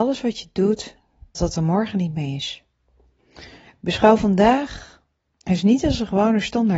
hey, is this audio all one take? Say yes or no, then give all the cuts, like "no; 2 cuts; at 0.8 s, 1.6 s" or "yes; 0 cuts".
no; 1 cut; at 1.3 s